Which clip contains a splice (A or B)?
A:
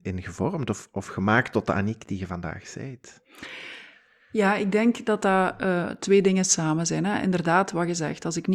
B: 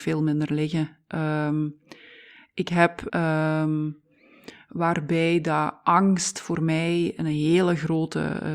B